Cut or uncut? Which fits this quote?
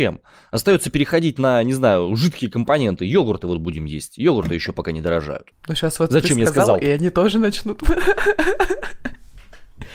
uncut